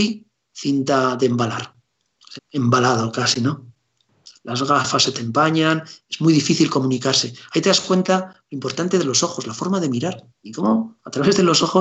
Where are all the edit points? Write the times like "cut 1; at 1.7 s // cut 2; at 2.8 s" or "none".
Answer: cut 1; at 2.4 s